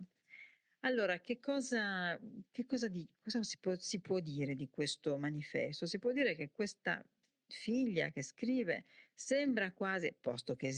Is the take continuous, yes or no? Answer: yes